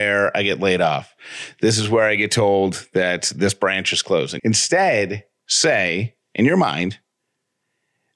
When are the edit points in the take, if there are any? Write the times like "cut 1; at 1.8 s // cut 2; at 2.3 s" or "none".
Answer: cut 1; at 4.4 s